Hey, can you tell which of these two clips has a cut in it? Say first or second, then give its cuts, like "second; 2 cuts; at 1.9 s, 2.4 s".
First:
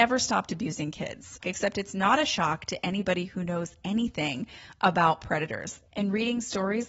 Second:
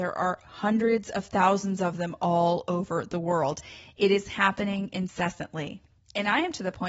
first; 2 cuts; at 1.4 s, 5.8 s